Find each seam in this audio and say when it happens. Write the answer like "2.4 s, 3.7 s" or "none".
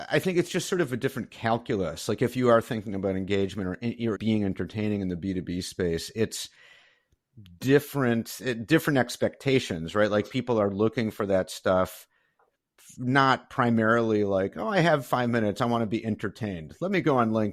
4.2 s